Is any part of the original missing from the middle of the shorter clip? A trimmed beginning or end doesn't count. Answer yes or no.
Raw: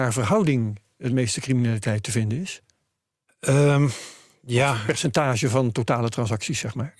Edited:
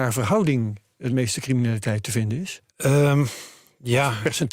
yes